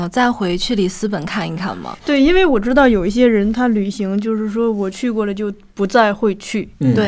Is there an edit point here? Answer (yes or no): no